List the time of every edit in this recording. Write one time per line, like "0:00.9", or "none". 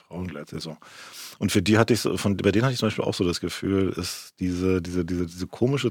none